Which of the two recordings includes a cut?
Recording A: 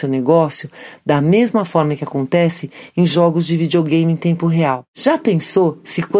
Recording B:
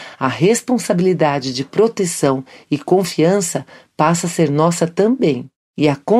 A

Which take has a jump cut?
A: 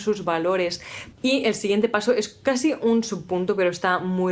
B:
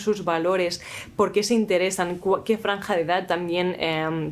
A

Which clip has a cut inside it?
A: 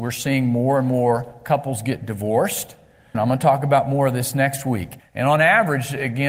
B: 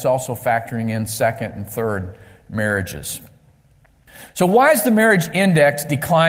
A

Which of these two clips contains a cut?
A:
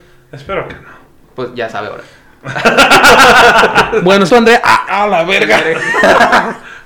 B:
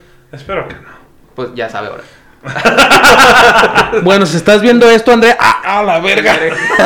A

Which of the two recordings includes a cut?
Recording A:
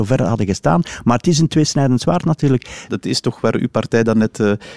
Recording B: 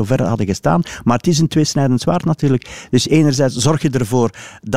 A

